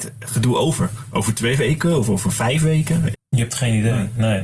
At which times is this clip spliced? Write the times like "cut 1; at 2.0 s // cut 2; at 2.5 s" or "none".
cut 1; at 3.1 s